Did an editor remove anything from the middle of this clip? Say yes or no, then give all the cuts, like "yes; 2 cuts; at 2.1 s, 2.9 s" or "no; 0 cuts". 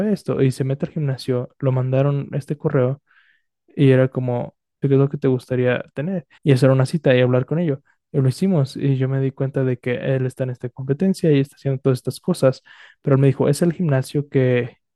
yes; 2 cuts; at 4.8 s, 6.4 s